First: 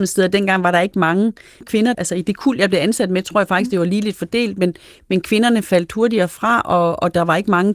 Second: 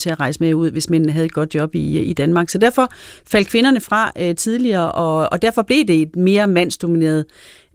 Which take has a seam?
first; 1 cut; at 1.9 s

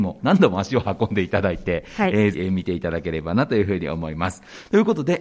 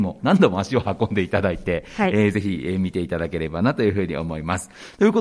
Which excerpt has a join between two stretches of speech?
first; 1 cut; at 2.3 s

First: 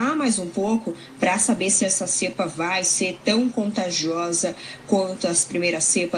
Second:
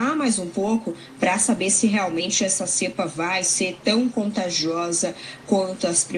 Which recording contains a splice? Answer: first; 1 cut; at 1.8 s

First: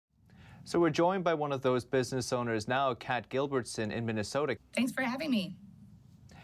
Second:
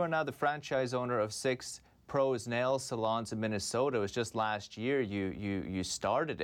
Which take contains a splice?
first; 1 cut; at 4.6 s

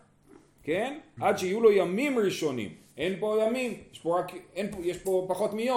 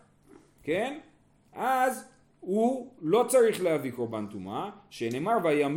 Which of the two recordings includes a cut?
first; 1 cut; at 1.2 s

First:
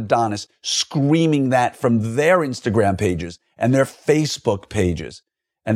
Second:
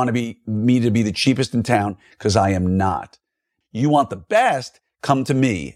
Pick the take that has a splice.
second; 1 cut; at 3.6 s

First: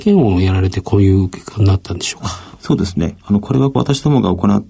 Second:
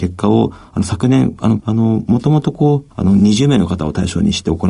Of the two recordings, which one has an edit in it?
second; 2 cuts; at 1.6 s, 2.9 s

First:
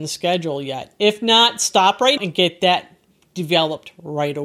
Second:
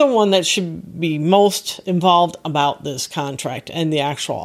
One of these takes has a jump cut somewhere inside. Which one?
first; 1 cut; at 2.2 s

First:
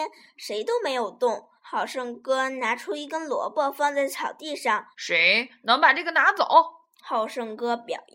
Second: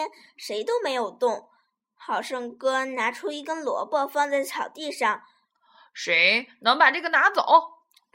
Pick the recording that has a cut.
first; 3 cuts; at 1.6 s, 4.9 s, 7.0 s

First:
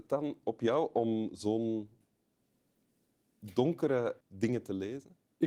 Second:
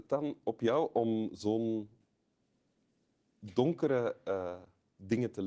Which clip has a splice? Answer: first; 1 cut; at 4.2 s

